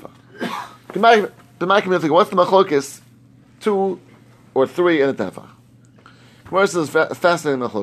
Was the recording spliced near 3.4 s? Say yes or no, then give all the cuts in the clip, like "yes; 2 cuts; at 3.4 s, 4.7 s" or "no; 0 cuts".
no; 0 cuts